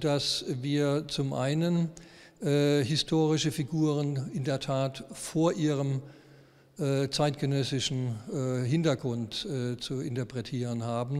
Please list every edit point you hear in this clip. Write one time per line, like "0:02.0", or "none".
none